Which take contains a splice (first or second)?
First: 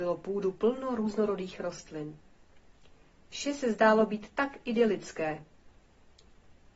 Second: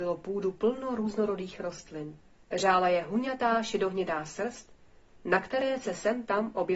second